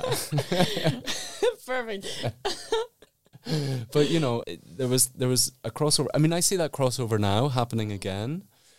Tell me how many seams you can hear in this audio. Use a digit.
1